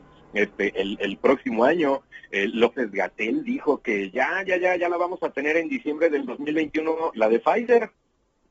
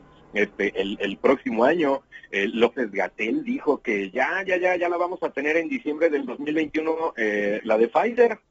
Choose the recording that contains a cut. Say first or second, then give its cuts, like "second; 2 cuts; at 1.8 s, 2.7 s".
first; 1 cut; at 7.1 s